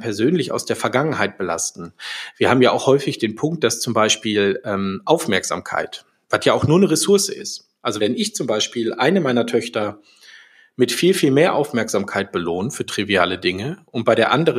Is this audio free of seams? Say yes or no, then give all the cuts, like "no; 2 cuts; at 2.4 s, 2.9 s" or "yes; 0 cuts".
yes; 0 cuts